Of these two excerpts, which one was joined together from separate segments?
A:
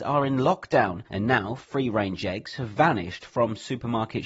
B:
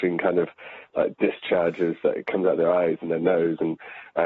A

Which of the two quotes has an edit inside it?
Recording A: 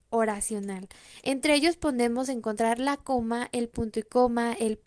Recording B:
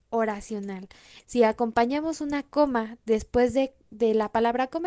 B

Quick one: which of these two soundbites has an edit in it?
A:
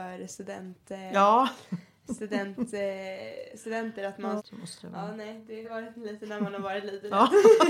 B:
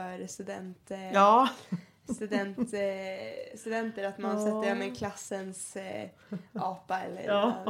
A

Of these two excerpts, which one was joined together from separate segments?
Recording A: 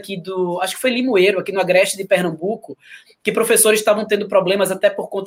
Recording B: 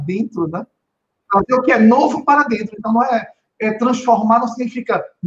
B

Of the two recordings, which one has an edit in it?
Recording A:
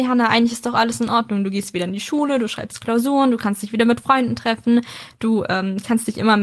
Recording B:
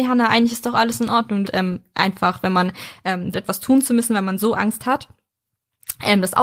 B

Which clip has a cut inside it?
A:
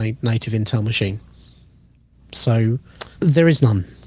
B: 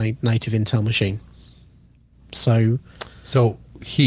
A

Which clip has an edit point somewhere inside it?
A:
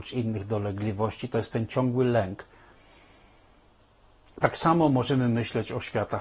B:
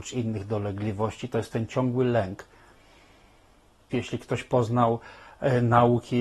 B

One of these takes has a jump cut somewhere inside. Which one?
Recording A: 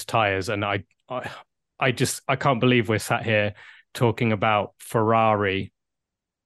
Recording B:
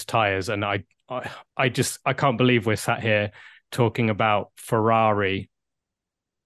B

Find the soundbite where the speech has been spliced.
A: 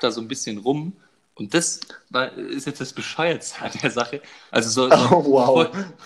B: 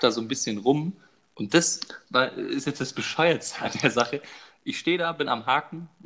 A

